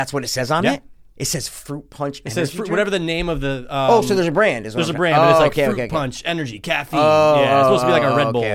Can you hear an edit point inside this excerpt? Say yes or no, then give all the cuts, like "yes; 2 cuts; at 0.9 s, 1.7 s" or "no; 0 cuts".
no; 0 cuts